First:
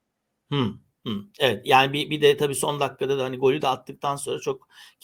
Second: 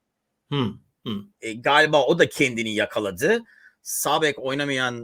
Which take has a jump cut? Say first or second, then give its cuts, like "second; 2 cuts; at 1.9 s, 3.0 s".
second; 1 cut; at 1.3 s